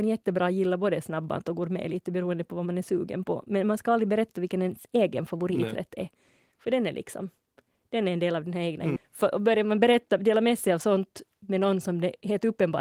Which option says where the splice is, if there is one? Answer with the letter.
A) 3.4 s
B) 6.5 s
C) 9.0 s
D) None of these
C